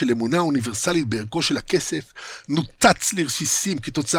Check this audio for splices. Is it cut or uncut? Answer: uncut